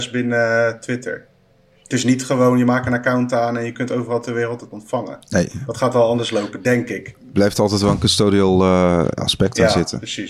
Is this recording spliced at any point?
no; 0 cuts

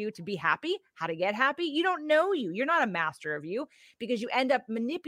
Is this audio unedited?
yes; 0 cuts

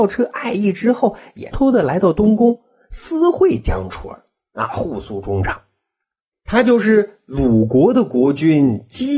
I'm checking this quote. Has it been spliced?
yes; 2 cuts; at 1.5 s, 6.3 s

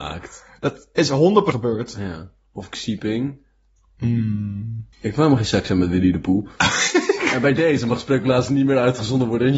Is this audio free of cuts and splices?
no; 2 cuts; at 1.5 s, 4.9 s

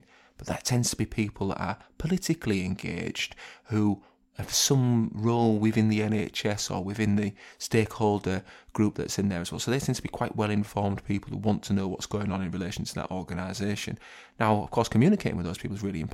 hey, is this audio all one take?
yes; 0 cuts

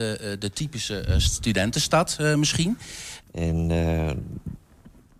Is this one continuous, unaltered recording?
no; 1 cut; at 3.2 s

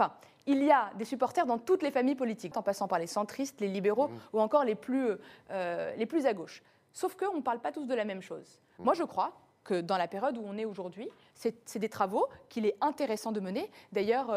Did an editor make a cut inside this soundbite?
yes; 1 cut; at 2.5 s

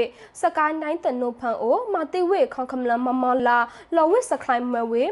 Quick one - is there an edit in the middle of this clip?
yes; 1 cut; at 3.4 s

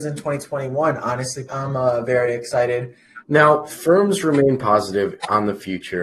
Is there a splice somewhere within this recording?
yes; 2 cuts; at 1.5 s, 3.3 s

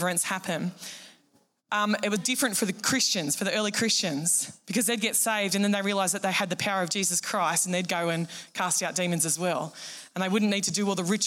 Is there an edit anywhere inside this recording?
yes; 1 cut; at 2.2 s

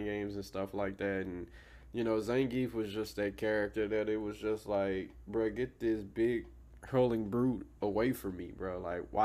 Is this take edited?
no; 0 cuts

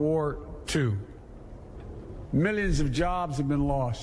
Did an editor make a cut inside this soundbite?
no; 0 cuts

